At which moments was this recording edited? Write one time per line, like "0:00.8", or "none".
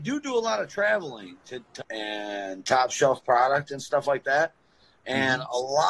0:01.8